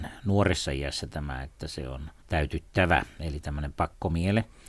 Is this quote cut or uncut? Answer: cut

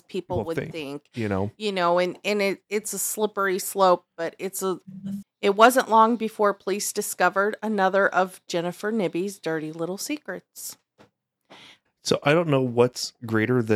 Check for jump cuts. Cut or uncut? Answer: cut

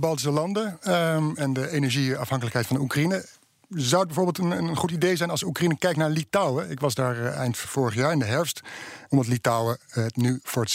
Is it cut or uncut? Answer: cut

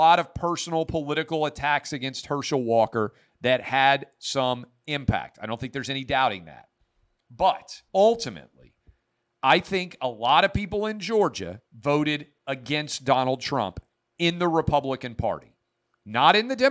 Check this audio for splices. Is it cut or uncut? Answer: cut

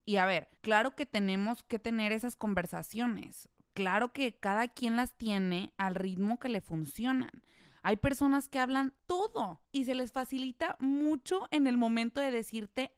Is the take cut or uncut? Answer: uncut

